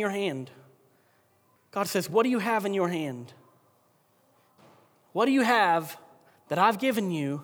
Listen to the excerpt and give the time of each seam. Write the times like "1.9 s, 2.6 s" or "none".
1.6 s